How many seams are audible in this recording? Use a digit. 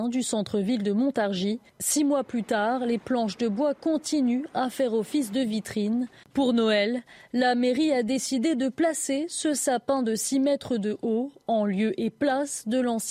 1